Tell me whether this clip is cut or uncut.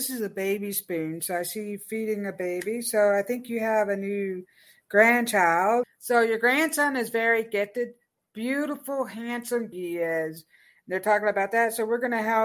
cut